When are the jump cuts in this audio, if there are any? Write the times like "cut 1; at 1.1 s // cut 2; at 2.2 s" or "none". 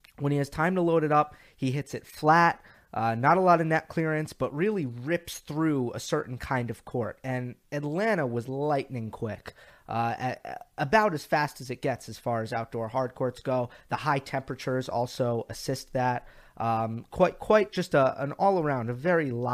none